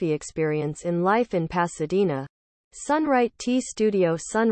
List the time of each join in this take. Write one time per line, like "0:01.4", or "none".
0:02.6